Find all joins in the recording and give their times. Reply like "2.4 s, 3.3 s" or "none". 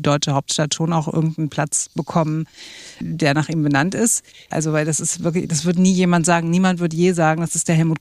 3.0 s, 4.5 s